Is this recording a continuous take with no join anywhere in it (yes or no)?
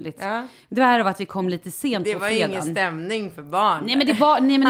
yes